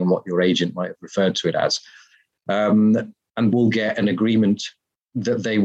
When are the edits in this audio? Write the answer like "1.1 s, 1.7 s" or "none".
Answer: 2.3 s, 3.5 s

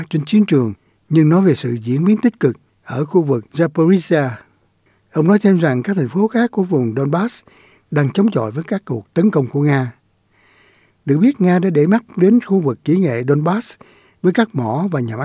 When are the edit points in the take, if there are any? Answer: none

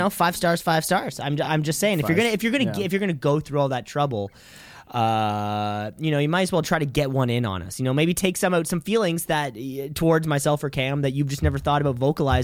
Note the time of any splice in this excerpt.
none

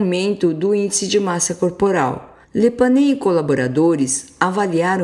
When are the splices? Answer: 2.4 s

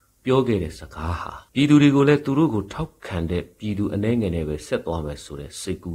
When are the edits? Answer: 1.5 s

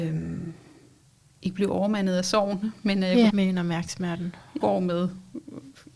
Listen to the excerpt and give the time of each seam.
3.3 s, 4.6 s

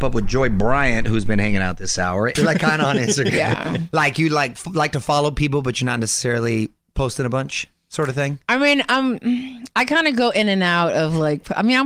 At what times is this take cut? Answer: 2.4 s

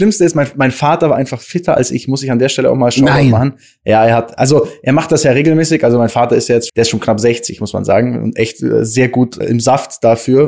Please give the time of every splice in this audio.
6.7 s, 9.4 s

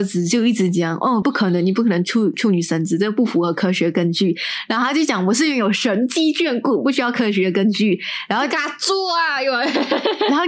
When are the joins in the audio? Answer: none

